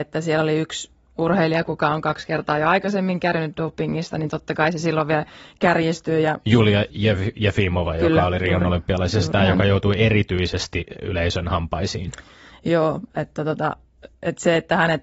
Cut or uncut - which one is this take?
uncut